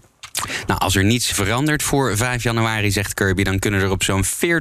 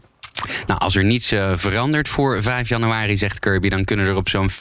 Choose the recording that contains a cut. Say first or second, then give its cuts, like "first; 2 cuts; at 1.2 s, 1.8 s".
first; 1 cut; at 1.3 s